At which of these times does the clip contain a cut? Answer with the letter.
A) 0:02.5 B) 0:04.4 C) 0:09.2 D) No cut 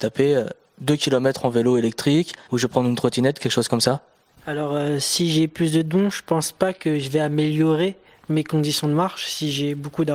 A